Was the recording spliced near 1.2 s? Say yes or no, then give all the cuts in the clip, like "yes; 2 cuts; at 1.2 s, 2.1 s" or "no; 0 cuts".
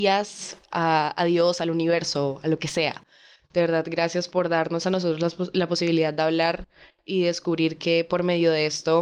no; 1 cut; at 4.3 s